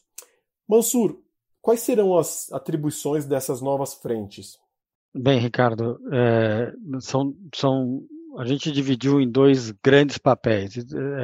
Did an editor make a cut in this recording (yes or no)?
no